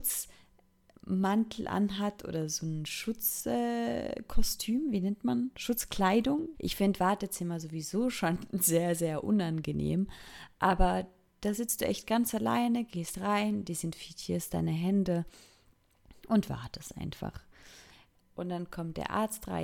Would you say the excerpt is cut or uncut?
cut